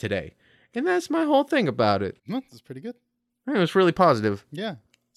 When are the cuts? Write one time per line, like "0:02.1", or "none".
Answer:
0:02.2